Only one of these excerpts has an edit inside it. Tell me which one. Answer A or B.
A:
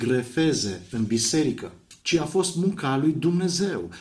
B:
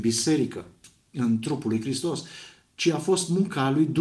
A